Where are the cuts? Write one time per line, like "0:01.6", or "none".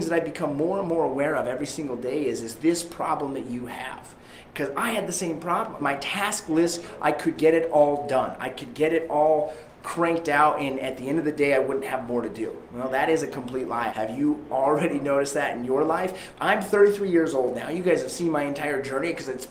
0:05.8
0:13.9
0:16.3